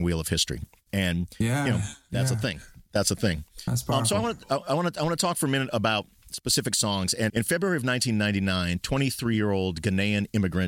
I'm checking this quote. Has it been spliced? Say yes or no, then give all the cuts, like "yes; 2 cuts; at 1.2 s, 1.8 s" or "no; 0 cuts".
yes; 1 cut; at 7.3 s